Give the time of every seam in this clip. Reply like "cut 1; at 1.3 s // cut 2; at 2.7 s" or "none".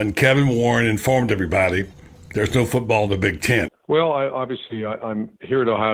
cut 1; at 3.7 s

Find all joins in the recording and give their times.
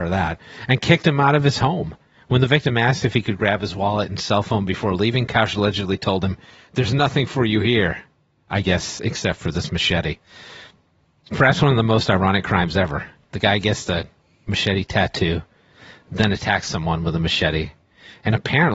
none

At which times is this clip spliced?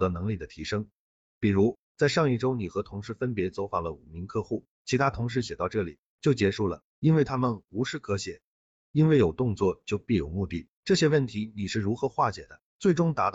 cut 1; at 8.8 s // cut 2; at 10.8 s

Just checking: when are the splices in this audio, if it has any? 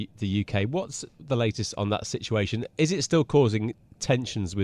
none

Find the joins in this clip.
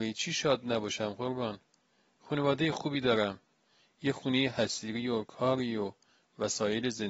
none

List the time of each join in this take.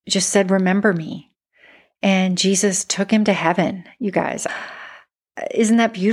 cut 1; at 4.5 s

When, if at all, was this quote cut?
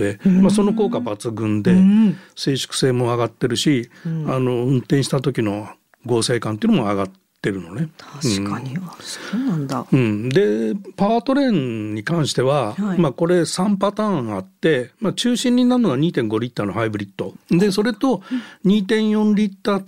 cut 1; at 17.3 s

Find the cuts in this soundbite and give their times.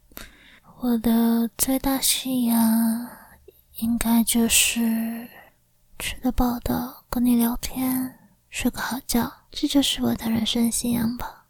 cut 1; at 6.3 s // cut 2; at 9.5 s

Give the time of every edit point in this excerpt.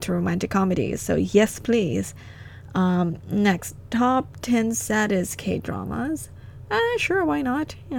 none

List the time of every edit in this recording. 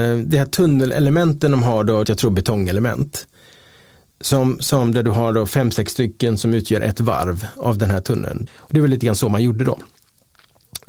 cut 1; at 2.0 s // cut 2; at 8.5 s

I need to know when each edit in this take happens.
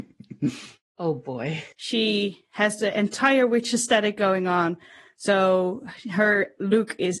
cut 1; at 1.7 s

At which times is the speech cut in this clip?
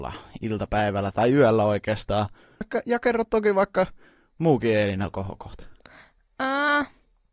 cut 1; at 2.6 s

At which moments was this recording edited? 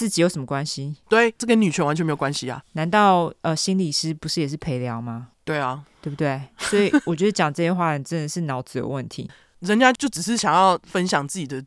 cut 1; at 2.6 s // cut 2; at 9.3 s

